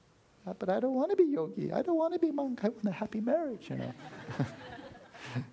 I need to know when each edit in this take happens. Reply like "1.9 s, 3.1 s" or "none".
none